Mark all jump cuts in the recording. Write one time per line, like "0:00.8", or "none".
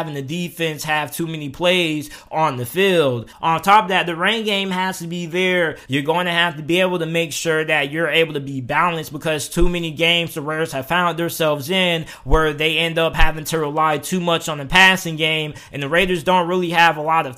0:03.3
0:05.8